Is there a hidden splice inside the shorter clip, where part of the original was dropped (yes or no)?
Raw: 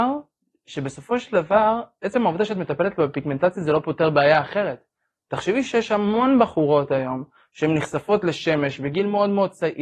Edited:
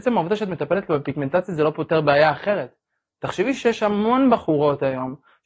no